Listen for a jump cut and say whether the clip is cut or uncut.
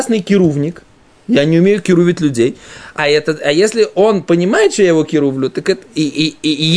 cut